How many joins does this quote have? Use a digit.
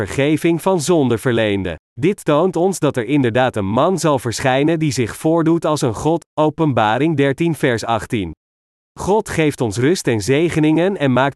2